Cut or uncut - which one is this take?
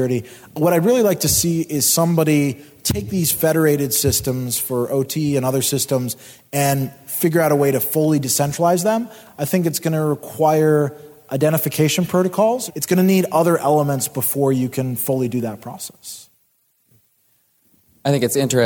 cut